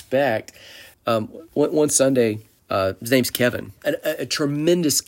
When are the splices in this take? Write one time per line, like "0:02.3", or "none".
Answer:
0:00.9
0:02.6
0:03.8

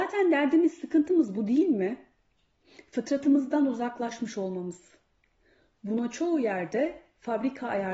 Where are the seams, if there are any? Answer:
none

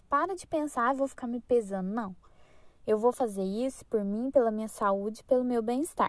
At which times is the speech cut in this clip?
none

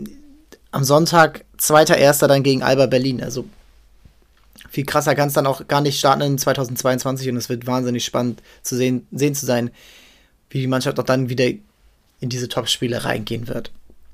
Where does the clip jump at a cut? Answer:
none

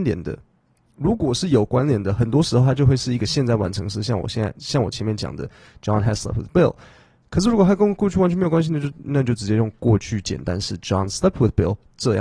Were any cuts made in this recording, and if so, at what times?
0:09.0

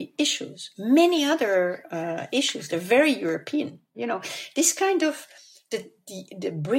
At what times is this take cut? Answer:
0:03.9

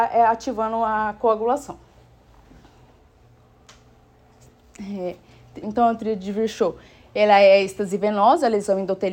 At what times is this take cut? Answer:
0:05.6

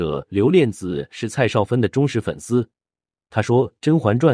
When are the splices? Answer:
none

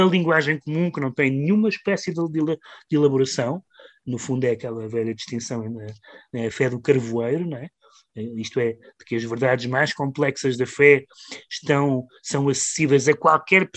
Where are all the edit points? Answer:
none

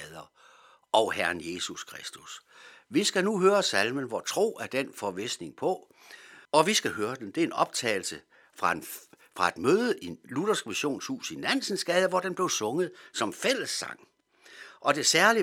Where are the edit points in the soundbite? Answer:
0:06.5

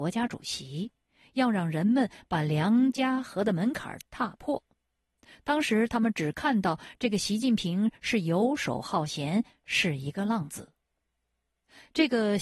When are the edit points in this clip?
none

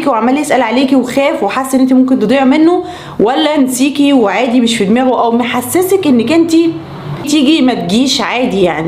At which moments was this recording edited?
0:07.2

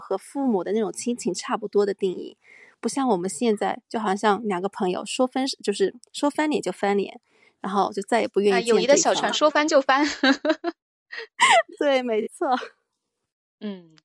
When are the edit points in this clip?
none

